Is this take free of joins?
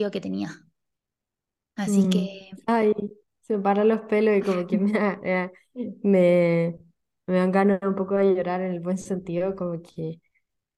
yes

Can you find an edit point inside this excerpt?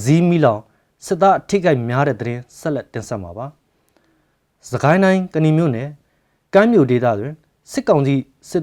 no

